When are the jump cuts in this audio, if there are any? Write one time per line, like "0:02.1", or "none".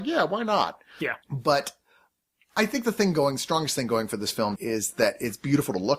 0:01.2
0:04.6